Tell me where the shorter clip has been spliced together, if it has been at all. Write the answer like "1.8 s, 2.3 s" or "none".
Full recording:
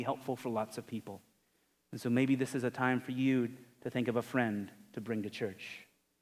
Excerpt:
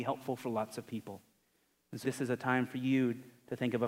2.0 s